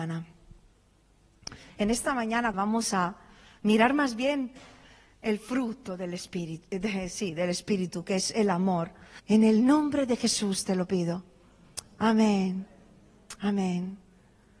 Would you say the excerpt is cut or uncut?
cut